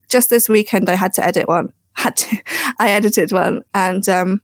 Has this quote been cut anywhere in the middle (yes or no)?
no